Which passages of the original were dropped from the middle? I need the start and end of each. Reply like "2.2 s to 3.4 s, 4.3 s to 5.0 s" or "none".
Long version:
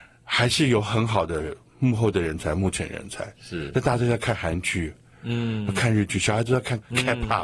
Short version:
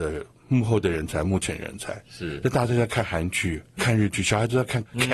5.1 s to 5.7 s